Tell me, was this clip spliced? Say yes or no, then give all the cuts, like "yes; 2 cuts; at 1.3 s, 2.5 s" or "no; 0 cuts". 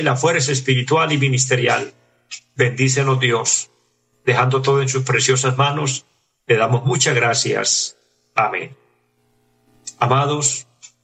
no; 0 cuts